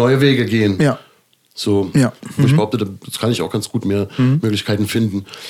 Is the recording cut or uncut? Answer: cut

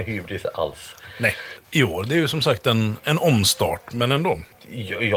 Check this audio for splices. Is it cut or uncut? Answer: cut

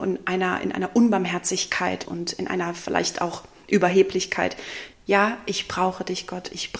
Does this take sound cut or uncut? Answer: cut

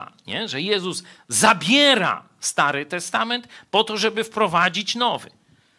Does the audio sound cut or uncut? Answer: uncut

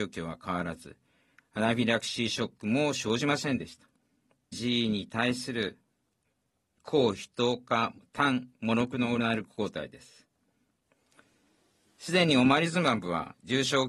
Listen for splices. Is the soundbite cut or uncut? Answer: cut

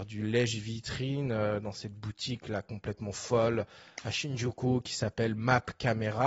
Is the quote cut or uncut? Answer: uncut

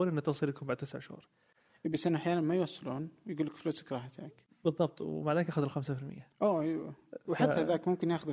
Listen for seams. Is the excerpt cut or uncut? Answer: uncut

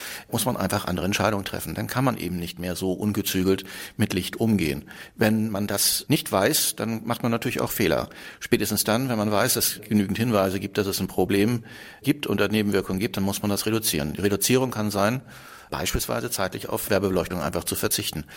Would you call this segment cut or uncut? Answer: uncut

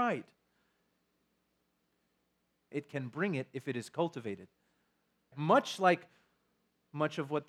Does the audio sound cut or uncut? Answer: cut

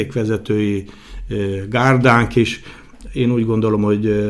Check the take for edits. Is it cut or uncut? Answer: uncut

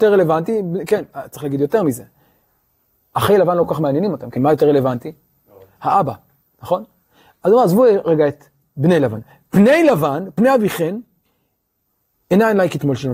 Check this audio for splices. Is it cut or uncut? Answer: cut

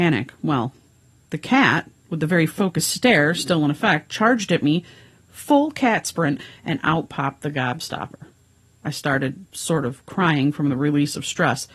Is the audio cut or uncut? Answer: cut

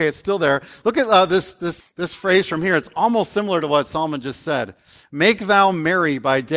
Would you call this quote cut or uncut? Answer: cut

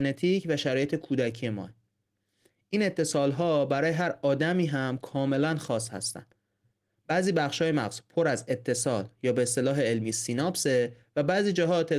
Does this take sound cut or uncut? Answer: uncut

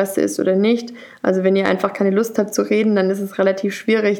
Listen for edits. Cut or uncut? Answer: uncut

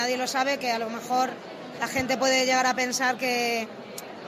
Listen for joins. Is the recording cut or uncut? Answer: uncut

